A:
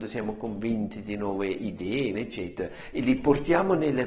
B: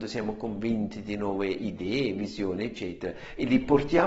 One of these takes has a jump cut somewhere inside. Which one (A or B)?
A